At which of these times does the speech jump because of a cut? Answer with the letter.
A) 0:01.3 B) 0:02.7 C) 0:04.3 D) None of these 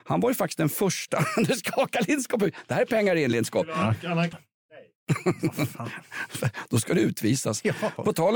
C